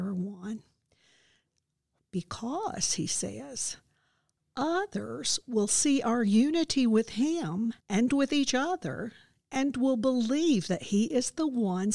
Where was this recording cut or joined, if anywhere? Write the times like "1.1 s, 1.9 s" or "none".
2.0 s, 7.8 s